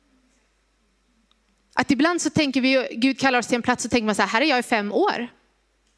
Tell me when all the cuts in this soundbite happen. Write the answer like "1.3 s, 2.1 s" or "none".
none